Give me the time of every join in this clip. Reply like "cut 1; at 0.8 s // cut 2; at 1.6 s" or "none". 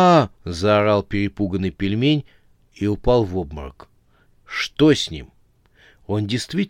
cut 1; at 4.3 s